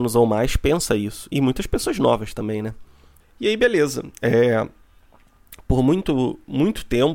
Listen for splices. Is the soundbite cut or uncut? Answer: cut